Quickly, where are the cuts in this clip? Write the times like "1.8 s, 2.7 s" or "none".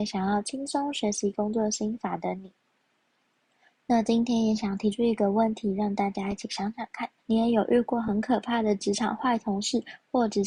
7.2 s